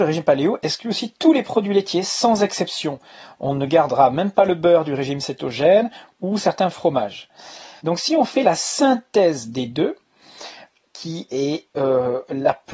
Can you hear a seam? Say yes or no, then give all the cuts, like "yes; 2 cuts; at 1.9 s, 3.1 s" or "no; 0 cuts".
yes; 2 cuts; at 7.8 s, 10.8 s